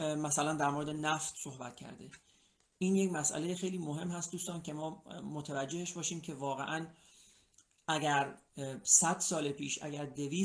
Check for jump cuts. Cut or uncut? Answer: cut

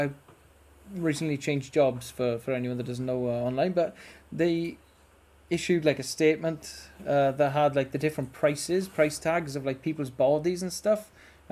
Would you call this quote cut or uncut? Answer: uncut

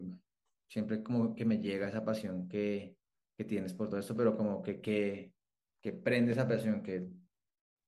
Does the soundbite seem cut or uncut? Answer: uncut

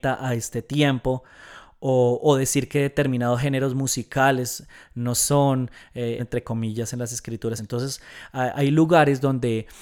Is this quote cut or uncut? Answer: cut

